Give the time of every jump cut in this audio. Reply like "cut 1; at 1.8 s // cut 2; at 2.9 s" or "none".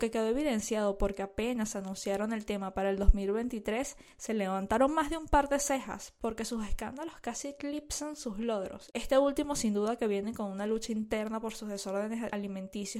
cut 1; at 8.9 s